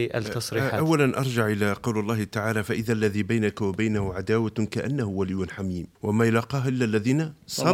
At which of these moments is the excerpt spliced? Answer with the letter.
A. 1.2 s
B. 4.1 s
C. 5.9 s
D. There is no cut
C